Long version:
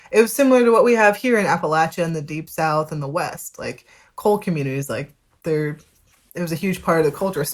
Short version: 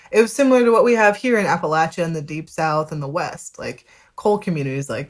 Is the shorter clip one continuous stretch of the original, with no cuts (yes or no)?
yes